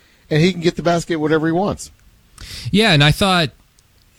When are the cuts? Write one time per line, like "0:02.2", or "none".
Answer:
none